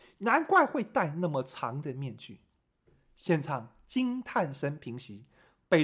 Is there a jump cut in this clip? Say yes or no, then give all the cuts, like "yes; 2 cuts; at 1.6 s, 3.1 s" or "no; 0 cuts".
no; 0 cuts